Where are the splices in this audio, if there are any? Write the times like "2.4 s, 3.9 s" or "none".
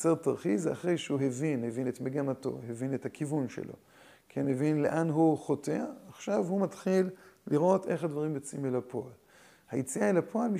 none